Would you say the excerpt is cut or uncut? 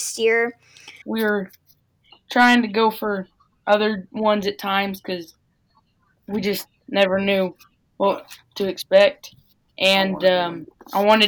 cut